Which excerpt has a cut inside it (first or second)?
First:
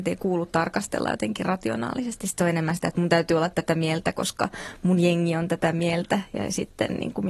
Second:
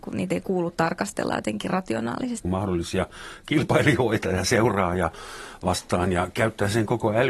second